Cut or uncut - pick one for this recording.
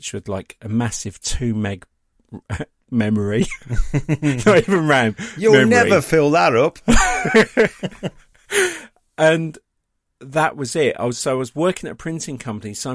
uncut